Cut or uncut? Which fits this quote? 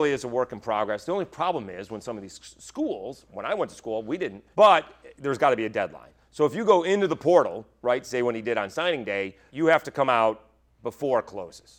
cut